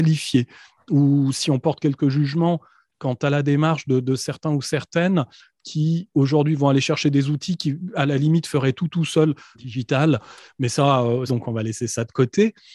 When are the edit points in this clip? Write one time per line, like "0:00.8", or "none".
0:09.5
0:11.3